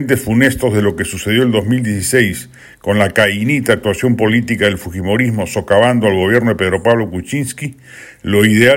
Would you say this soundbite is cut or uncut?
uncut